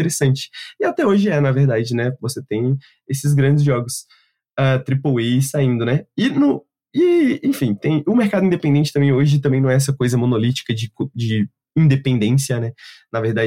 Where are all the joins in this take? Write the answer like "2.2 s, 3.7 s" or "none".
none